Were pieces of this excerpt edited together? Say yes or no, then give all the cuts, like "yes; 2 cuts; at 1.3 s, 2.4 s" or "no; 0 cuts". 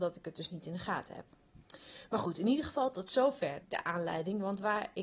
yes; 1 cut; at 3.6 s